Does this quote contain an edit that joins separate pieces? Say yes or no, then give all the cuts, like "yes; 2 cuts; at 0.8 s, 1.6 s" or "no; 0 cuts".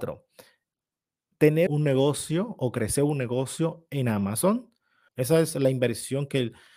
yes; 2 cuts; at 1.7 s, 5.1 s